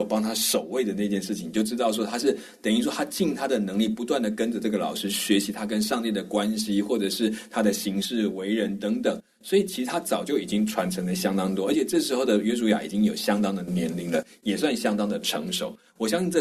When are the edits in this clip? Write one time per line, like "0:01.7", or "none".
none